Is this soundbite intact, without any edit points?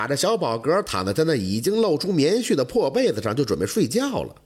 yes; 0 cuts

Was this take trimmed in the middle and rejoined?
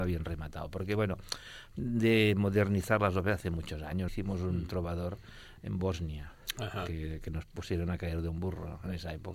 yes; 1 cut; at 4.1 s

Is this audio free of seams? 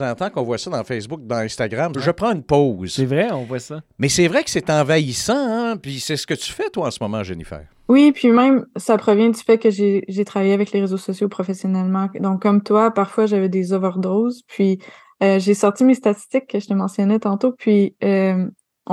no; 1 cut; at 1.9 s

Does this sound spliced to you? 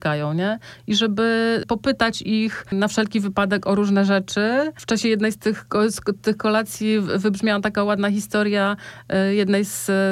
no; 0 cuts

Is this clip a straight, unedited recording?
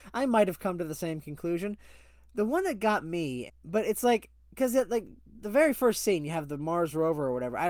no; 1 cut; at 3.5 s

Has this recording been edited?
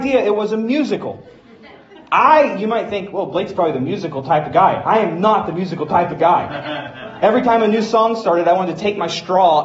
no; 0 cuts

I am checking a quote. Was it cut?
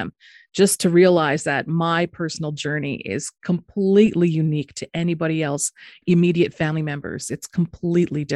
yes; 1 cut; at 6.0 s

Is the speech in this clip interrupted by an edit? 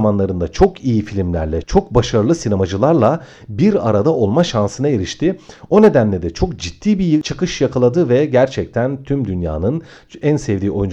yes; 1 cut; at 1.6 s

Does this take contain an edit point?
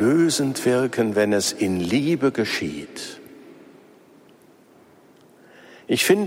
no; 0 cuts

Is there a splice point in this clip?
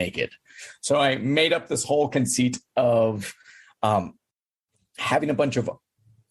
no; 0 cuts

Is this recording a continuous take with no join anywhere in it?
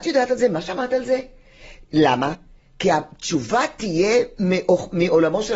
yes; 0 cuts

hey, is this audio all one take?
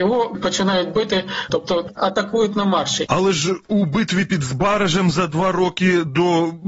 no; 2 cuts; at 1.5 s, 3.1 s

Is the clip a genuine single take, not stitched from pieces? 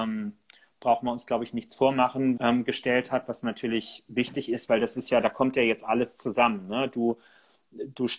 no; 1 cut; at 2.4 s

